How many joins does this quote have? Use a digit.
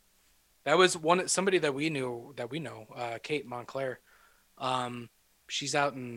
0